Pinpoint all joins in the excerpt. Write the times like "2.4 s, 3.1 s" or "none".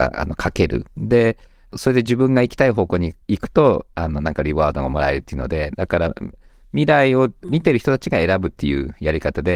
3.2 s